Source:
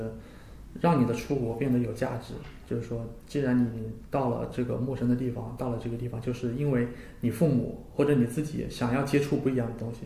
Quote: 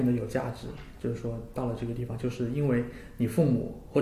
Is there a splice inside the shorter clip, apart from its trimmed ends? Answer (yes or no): yes